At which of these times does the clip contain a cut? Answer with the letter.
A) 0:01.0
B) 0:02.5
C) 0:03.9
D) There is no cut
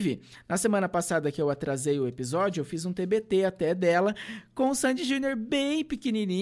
D